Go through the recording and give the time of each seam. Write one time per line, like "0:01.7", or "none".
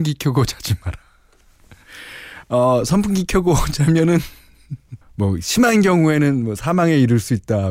0:05.0